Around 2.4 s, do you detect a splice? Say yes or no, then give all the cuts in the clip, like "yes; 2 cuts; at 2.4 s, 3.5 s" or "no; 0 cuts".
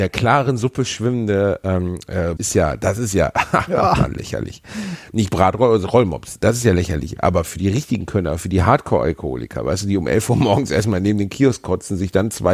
yes; 1 cut; at 2.4 s